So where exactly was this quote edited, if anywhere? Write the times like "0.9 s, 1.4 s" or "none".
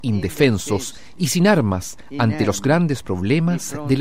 none